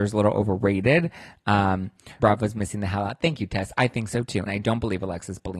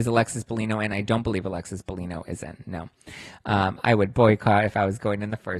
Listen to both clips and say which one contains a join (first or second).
first